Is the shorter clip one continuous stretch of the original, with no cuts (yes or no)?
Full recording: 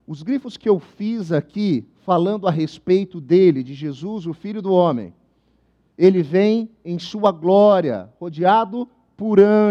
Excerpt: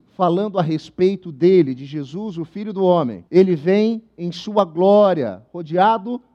no